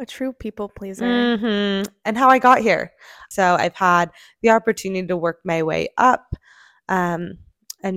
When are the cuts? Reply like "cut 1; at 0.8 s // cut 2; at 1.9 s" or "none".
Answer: cut 1; at 3.3 s